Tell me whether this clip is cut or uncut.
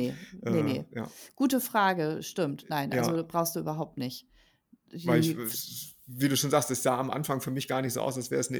uncut